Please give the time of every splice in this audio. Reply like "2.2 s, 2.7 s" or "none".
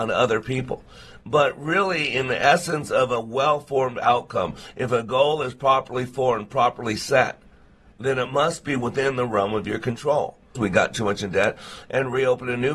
10.5 s